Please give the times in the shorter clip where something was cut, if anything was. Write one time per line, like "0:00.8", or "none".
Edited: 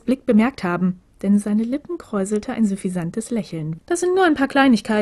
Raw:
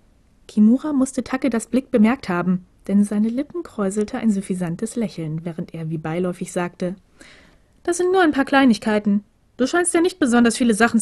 0:03.8